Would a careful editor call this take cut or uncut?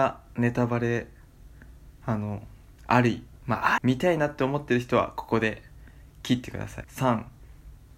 cut